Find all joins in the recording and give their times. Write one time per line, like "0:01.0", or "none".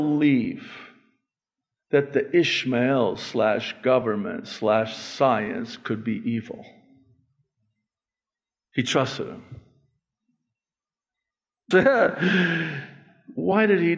0:11.7